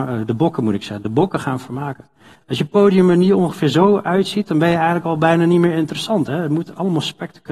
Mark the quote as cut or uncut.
cut